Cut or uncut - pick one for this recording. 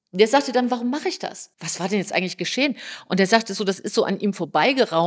cut